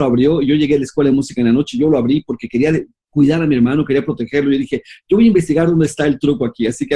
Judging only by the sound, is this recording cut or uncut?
uncut